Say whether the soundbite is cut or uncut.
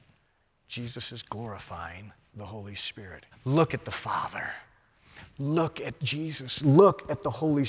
cut